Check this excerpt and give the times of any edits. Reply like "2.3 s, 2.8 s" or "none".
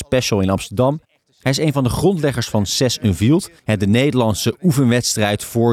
3.6 s